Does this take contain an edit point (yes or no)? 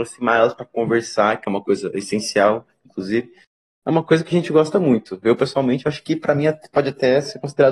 no